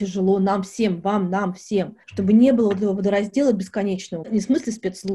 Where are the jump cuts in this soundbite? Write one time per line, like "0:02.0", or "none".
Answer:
0:02.0
0:04.2